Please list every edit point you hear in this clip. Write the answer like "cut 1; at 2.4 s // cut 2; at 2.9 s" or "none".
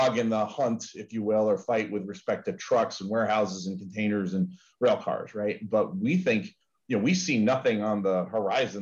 none